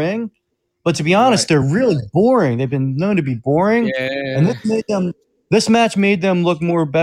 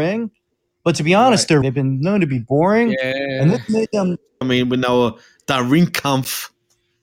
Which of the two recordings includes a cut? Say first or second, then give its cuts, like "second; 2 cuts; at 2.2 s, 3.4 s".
second; 2 cuts; at 1.6 s, 4.4 s